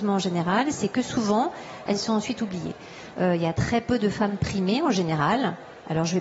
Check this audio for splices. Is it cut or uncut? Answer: cut